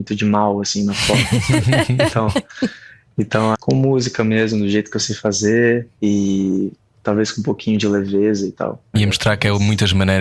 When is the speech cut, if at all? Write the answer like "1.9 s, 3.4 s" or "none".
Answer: 3.5 s, 8.9 s